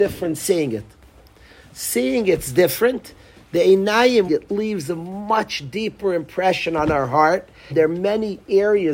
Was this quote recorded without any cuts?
no; 2 cuts; at 4.3 s, 7.7 s

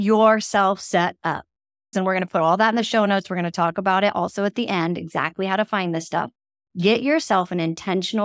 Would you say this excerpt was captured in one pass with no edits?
no; 1 cut; at 1.9 s

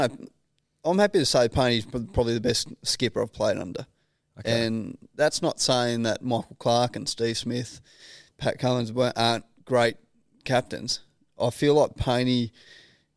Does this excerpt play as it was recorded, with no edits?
yes; 0 cuts

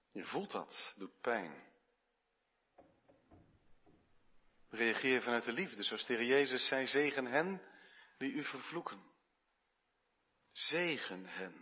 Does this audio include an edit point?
no; 0 cuts

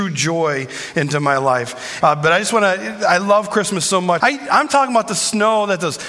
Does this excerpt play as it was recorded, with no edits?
no; 2 cuts; at 2.0 s, 4.2 s

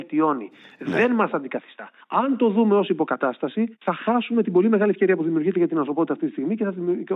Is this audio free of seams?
no; 1 cut; at 2.0 s

